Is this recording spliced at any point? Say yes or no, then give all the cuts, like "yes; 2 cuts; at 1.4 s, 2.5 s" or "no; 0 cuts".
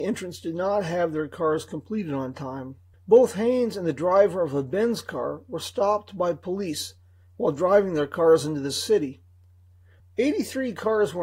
yes; 2 cuts; at 2.9 s, 10.0 s